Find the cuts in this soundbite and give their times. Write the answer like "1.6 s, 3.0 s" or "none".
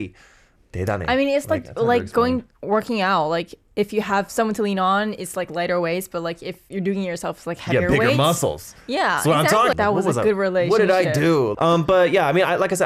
9.7 s, 11.5 s

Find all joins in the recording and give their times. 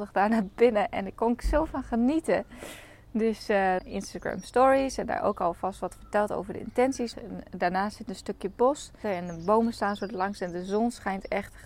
3.8 s, 7.1 s, 9.0 s

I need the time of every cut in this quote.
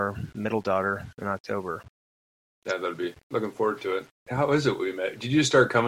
4.3 s

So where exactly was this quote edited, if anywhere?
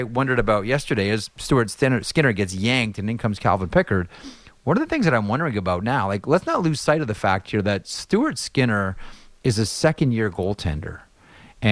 none

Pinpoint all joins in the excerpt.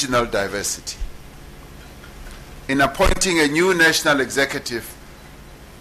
2.7 s

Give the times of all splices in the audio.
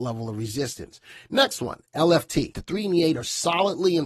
2.5 s

